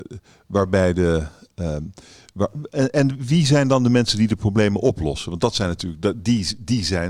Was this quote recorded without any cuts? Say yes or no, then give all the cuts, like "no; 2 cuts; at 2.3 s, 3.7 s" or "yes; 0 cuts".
yes; 0 cuts